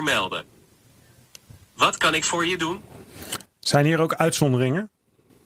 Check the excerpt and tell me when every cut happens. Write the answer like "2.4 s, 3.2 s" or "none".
none